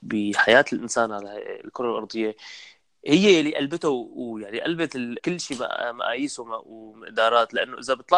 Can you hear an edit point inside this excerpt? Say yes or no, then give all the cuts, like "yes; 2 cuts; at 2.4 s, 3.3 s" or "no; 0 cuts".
yes; 1 cut; at 5.2 s